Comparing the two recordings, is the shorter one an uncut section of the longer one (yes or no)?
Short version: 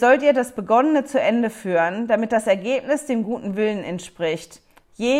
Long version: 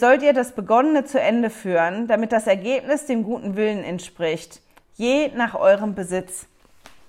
yes